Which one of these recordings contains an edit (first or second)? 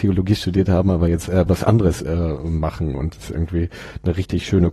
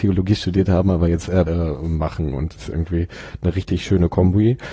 second